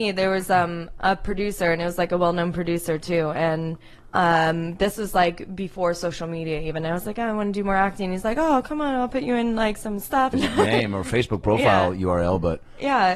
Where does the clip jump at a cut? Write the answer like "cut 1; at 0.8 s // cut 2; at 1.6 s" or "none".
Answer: cut 1; at 10.3 s